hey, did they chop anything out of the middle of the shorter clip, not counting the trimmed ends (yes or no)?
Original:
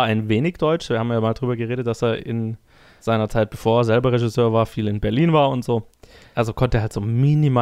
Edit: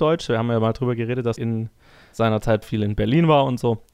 yes